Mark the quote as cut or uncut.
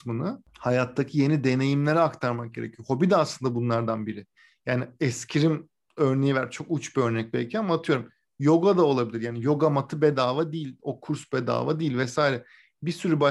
uncut